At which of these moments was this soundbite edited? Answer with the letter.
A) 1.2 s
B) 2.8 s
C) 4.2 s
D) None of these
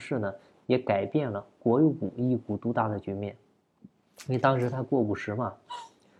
D